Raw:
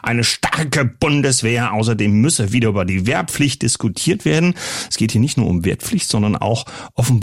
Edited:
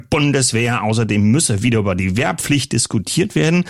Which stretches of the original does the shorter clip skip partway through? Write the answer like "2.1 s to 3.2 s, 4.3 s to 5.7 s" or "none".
none